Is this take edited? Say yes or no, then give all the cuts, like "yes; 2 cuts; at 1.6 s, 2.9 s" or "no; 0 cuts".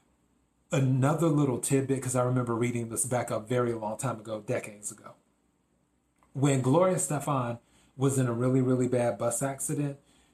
no; 0 cuts